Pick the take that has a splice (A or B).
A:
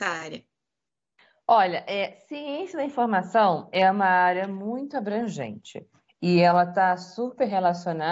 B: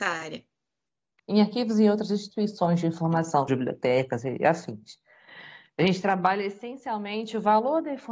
B